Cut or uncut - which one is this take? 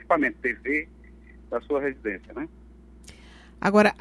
uncut